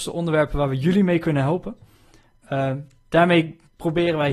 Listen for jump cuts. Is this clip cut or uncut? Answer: uncut